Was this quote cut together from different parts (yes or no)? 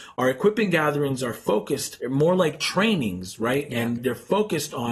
yes